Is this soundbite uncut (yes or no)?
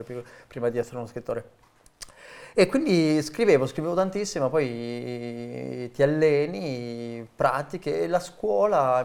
yes